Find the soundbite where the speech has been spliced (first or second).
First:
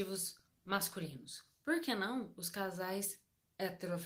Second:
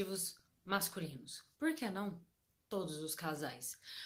second